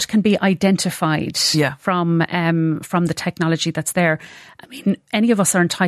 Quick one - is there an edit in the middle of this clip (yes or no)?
no